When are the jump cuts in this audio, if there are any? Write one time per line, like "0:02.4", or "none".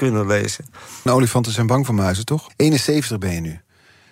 0:01.1
0:02.5